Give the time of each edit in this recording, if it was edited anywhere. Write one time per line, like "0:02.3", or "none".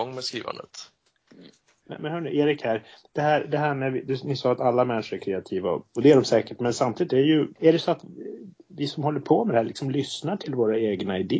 0:01.8
0:07.6